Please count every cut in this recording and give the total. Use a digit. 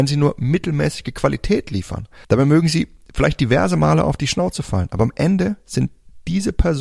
1